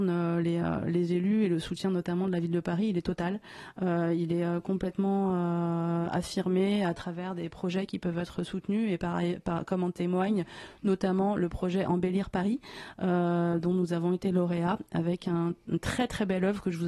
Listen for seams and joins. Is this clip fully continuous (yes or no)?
yes